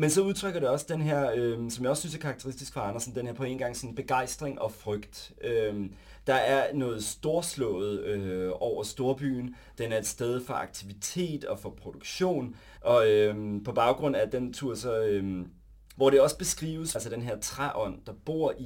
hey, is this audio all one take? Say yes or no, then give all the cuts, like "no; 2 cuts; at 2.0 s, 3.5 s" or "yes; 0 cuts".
no; 3 cuts; at 12.8 s, 15.9 s, 16.9 s